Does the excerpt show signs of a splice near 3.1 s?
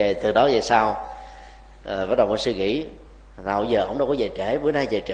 no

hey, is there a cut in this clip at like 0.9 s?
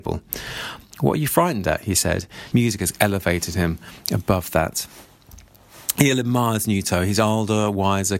no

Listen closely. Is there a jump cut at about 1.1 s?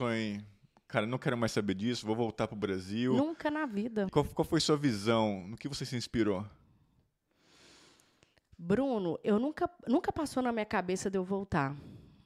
no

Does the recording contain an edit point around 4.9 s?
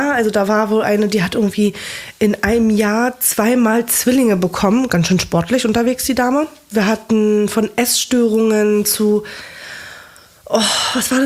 no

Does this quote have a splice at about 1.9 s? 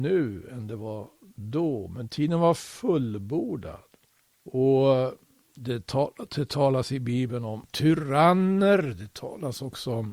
no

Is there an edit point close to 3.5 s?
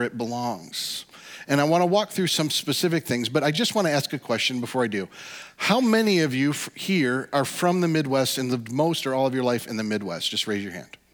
no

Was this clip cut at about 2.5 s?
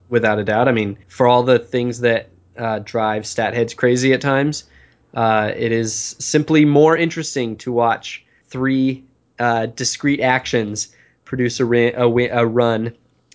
no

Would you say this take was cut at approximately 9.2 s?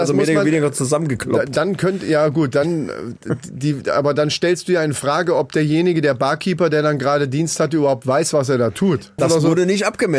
yes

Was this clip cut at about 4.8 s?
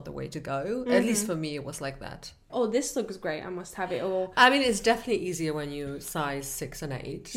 no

